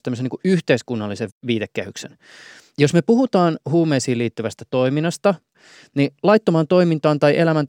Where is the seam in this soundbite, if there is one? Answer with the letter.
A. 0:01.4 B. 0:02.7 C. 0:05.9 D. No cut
B